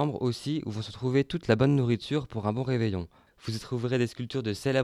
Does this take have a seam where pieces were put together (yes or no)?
yes